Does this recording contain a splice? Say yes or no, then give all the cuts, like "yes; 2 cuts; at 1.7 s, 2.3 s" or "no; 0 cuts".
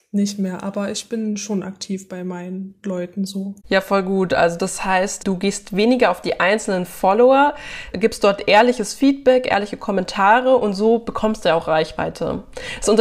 yes; 2 cuts; at 5.2 s, 7.9 s